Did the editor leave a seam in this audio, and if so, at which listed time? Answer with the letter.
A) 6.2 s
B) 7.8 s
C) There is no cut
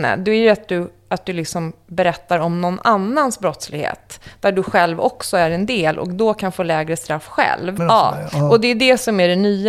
B